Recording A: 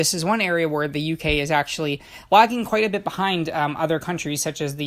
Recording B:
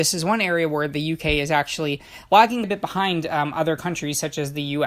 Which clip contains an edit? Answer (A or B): B